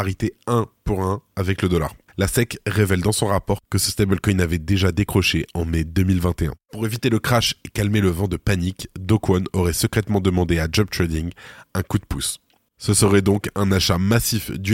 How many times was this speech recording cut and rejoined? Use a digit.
0